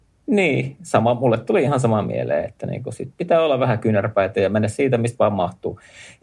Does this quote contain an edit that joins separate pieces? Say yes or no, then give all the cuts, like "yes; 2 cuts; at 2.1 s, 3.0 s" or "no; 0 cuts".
no; 0 cuts